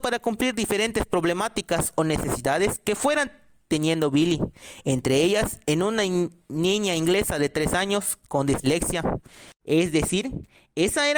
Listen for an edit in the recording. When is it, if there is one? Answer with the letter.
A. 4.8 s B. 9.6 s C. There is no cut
B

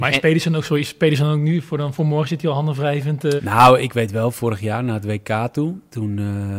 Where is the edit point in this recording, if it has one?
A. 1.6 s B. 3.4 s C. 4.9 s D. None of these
B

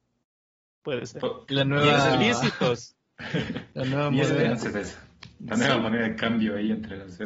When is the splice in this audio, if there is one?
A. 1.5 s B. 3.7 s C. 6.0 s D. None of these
A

